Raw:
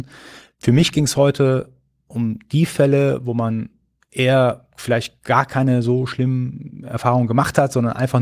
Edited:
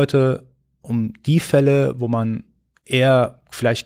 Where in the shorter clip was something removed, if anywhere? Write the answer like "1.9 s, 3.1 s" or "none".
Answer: none